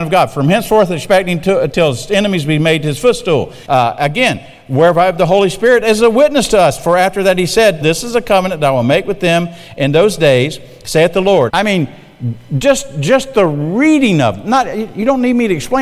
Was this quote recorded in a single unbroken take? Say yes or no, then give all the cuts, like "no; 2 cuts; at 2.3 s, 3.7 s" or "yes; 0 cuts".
no; 3 cuts; at 3.7 s, 7.8 s, 11.5 s